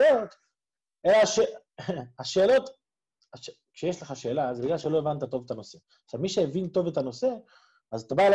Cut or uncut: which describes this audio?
uncut